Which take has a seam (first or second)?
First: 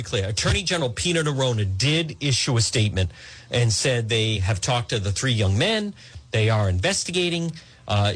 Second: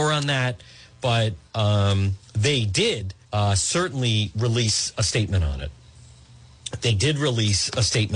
second